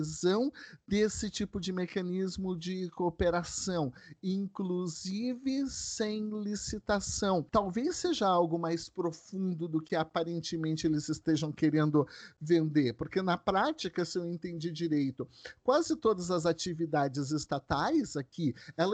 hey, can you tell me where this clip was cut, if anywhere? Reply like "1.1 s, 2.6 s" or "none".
7.5 s

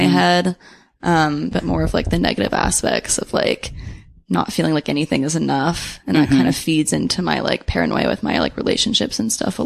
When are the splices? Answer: 1.5 s

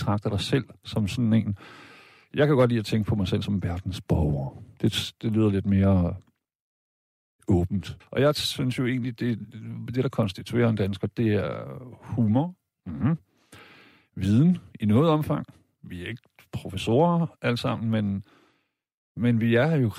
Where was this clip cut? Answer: 8.0 s

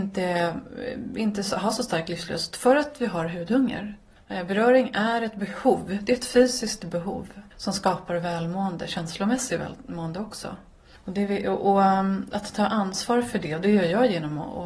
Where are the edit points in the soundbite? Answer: 7.5 s

